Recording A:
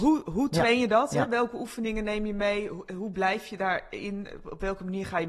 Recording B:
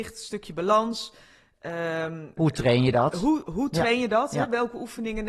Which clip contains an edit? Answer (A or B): B